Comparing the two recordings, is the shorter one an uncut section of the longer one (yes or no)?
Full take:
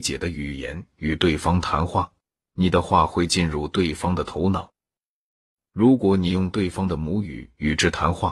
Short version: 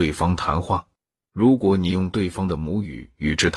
no